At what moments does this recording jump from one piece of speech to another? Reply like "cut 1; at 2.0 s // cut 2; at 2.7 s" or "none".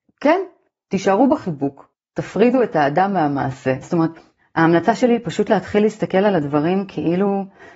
cut 1; at 3.8 s

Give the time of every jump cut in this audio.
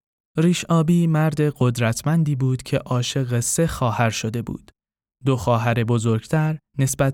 none

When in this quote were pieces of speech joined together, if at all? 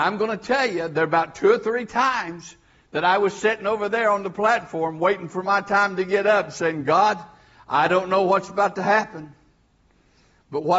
none

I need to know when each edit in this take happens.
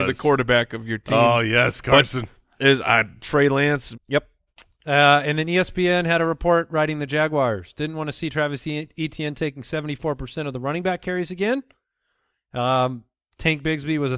cut 1; at 3.9 s

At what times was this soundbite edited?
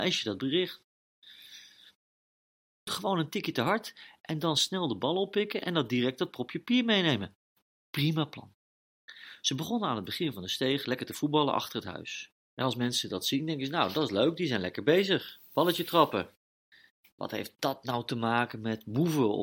cut 1; at 2.9 s // cut 2; at 12.3 s

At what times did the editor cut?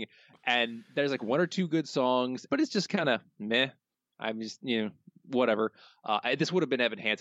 cut 1; at 2.5 s

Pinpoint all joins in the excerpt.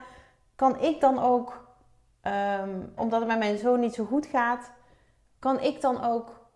cut 1; at 3.0 s

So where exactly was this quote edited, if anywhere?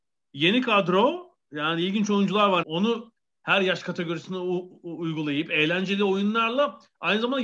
cut 1; at 2.6 s

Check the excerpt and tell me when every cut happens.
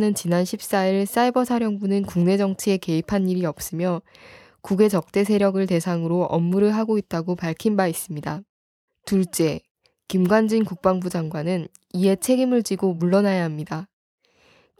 cut 1; at 8.9 s

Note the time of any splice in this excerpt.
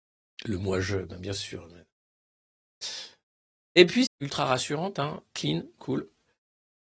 cut 1; at 4.1 s // cut 2; at 5.3 s

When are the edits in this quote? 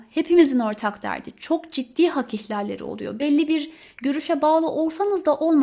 none

